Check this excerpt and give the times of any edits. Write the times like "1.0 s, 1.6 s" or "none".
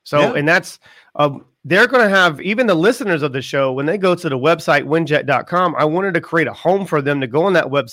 none

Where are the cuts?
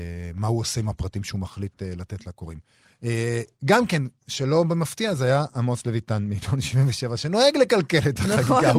2.9 s

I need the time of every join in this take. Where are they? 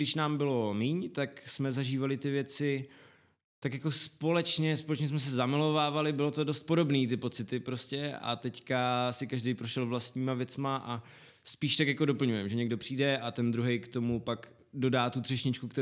none

